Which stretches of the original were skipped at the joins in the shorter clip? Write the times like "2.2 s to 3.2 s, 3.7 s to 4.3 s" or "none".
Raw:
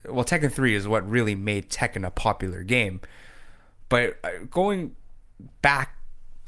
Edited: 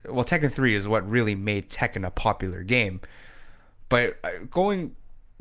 none